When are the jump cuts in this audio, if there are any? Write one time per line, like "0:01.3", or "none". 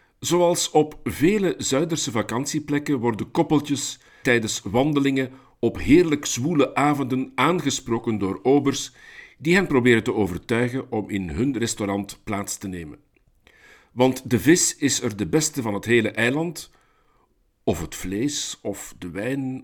0:04.2

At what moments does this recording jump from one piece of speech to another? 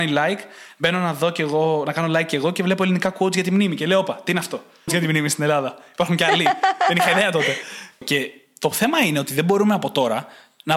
0:04.9
0:08.0

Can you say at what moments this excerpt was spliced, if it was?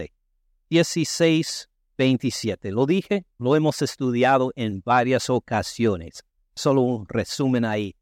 0:03.4

